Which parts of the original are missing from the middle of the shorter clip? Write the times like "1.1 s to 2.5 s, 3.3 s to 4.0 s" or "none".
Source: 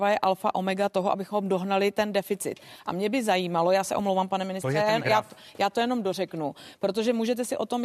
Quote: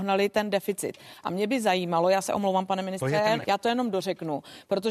5.0 s to 5.5 s